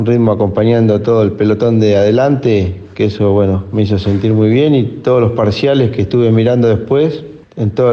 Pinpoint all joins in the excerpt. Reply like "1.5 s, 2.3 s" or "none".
none